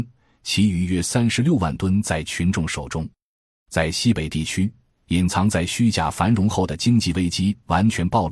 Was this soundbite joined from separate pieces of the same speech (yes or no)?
no